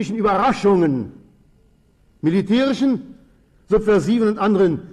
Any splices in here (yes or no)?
no